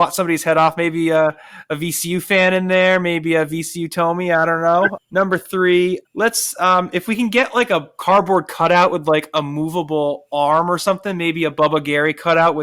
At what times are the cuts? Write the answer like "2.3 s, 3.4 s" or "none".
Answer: 5.0 s, 6.1 s